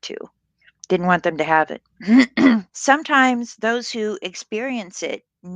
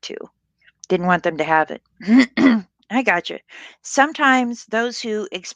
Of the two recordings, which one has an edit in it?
first; 1 cut; at 2.7 s

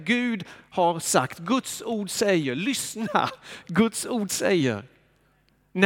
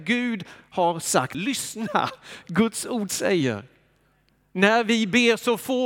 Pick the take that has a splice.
second; 1 cut; at 1.3 s

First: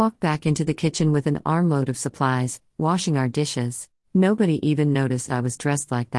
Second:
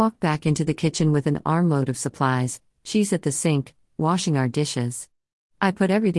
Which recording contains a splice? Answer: first; 2 cuts; at 2.7 s, 4.0 s

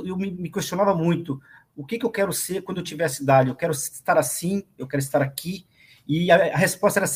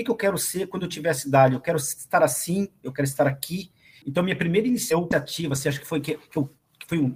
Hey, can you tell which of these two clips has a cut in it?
second; 1 cut; at 4.0 s

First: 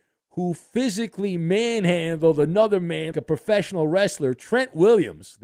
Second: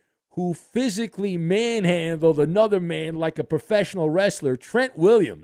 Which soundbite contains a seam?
first; 1 cut; at 3.1 s

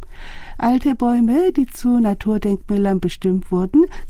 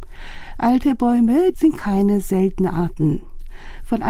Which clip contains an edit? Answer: second; 1 cut; at 1.5 s

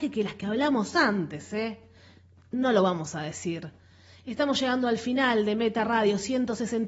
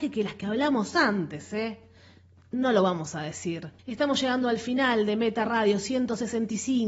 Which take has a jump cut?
second; 1 cut; at 3.8 s

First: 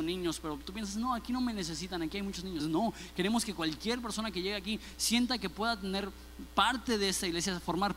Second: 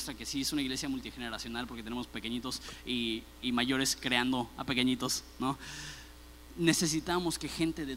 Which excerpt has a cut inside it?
first; 1 cut; at 2.6 s

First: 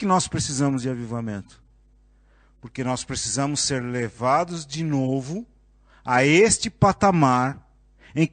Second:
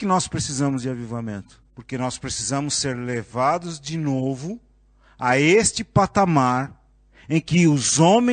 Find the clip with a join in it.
second; 1 cut; at 1.7 s

